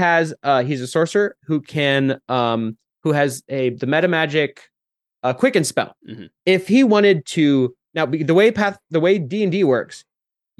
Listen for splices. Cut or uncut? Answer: cut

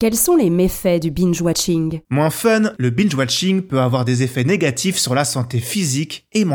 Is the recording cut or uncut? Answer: cut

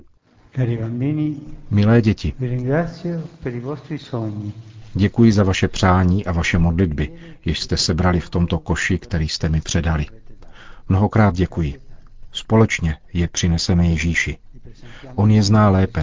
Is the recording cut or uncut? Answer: uncut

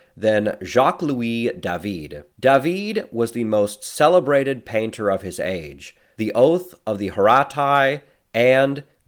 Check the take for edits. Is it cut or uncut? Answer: cut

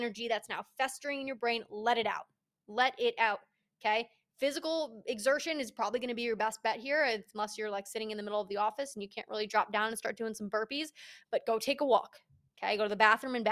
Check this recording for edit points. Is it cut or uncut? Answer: uncut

